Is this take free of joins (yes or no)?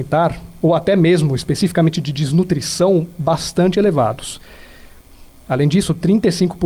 no